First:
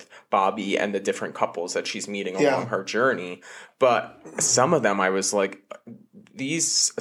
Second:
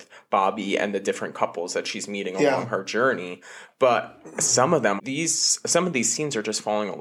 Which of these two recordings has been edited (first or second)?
second